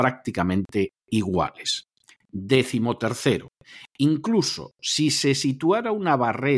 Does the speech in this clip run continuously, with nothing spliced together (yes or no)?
yes